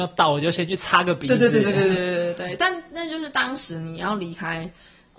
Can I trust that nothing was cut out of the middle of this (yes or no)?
yes